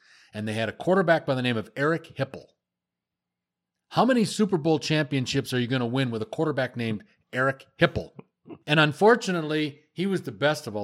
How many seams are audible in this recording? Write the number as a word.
one